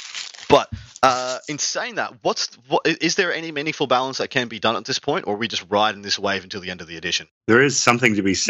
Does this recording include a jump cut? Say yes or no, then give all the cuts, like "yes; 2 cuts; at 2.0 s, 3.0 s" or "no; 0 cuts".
no; 0 cuts